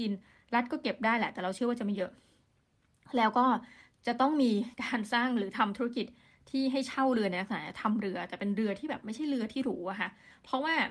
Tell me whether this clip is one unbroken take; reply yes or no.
no